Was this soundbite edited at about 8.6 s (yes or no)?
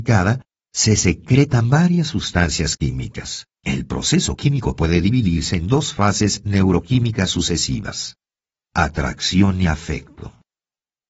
no